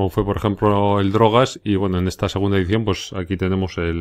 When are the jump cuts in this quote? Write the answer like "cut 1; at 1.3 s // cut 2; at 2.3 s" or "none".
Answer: none